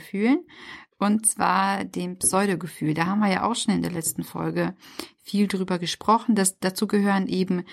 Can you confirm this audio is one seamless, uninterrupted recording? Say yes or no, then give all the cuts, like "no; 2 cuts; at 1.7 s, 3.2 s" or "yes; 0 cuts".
no; 1 cut; at 0.9 s